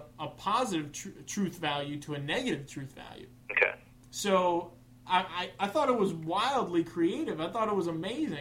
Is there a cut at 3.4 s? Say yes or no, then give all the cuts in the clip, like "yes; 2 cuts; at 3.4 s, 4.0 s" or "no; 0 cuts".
yes; 1 cut; at 3.4 s